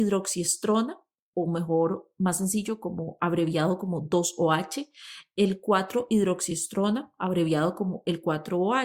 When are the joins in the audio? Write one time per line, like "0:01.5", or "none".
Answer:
none